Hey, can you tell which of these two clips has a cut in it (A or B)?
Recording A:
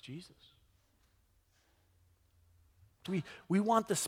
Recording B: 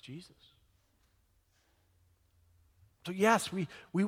A